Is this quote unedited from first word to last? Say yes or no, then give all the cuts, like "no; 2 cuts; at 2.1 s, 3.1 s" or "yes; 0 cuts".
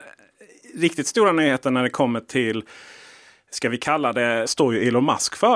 no; 1 cut; at 4.5 s